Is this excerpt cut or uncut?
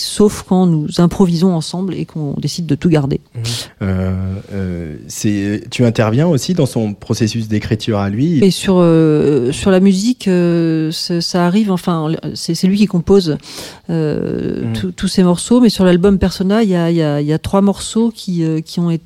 cut